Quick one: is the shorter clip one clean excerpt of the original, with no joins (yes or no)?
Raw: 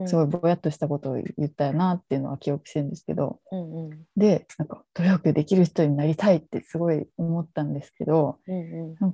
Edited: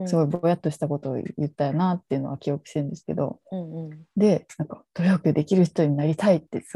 yes